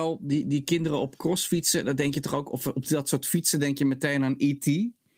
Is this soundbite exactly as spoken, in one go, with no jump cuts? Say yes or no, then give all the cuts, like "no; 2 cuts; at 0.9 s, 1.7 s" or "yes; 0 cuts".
yes; 0 cuts